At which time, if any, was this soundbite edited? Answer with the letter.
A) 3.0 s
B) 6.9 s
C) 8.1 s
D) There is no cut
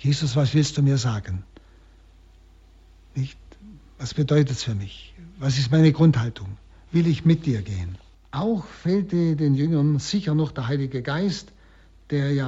C